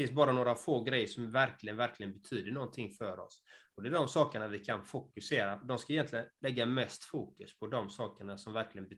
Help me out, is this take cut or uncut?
uncut